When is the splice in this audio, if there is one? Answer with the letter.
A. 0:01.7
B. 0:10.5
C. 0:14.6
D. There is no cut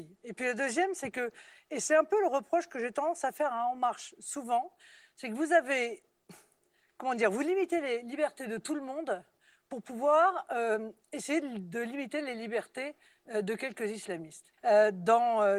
C